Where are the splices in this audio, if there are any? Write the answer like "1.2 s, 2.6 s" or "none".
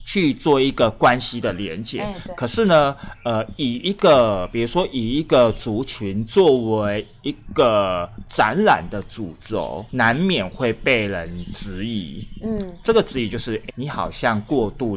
9.9 s, 13.7 s